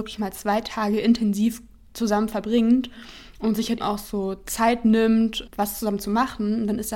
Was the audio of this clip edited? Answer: yes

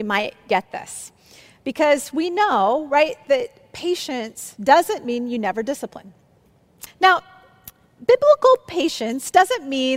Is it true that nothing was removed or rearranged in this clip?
no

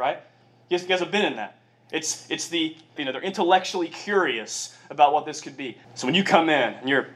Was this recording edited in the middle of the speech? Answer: yes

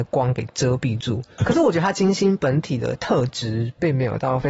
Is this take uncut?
yes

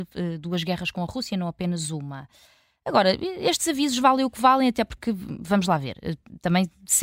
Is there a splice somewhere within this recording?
no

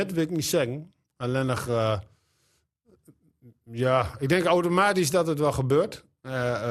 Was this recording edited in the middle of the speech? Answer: no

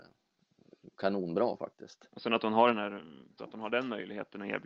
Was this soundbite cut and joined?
yes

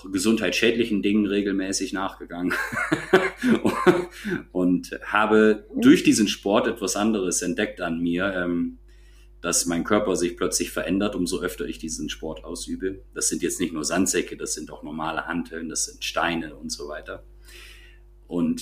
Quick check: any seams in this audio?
no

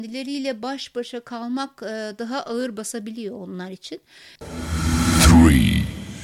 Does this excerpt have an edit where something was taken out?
yes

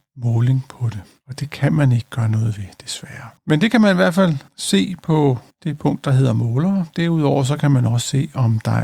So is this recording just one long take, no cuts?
no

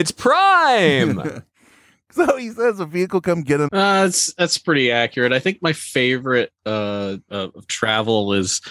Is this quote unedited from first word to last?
no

